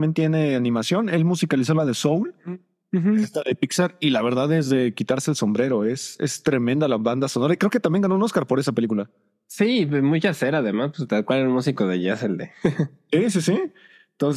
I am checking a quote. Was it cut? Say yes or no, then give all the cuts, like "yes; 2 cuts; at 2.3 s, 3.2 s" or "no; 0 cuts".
no; 0 cuts